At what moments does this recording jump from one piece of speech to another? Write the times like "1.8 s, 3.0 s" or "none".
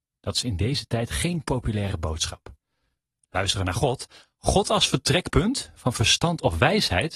none